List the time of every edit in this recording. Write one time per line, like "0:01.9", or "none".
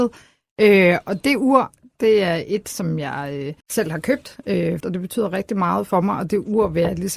0:03.6
0:04.8